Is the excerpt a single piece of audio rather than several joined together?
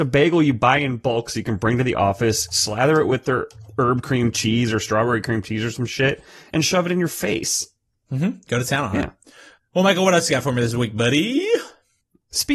yes; 0 cuts

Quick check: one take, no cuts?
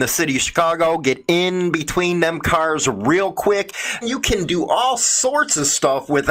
no; 1 cut; at 4.0 s

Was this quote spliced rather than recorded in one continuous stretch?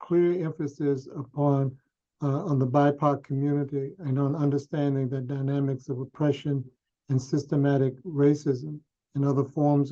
no; 0 cuts

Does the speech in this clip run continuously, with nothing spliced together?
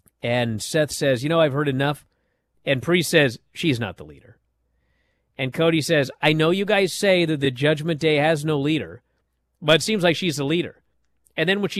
no; 1 cut; at 2.5 s

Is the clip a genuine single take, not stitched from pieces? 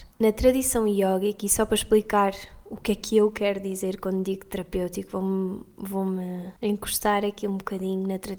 yes; 0 cuts

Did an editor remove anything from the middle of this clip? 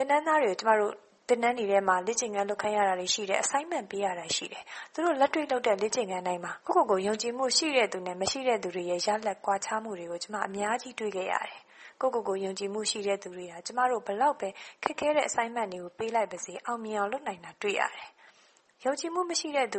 yes; 1 cut; at 6.6 s

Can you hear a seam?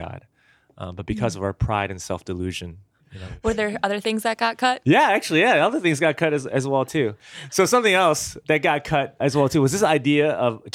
yes; 1 cut; at 9.2 s

